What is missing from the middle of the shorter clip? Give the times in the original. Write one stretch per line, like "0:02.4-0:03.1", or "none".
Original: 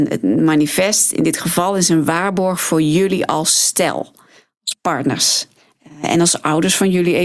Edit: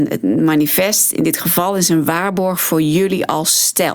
none